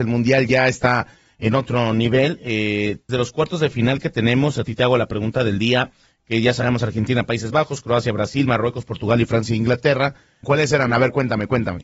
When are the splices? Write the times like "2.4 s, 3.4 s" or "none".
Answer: 3.1 s, 10.4 s